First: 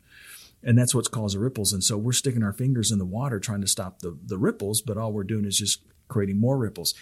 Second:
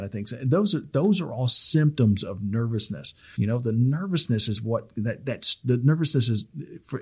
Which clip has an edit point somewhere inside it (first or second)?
second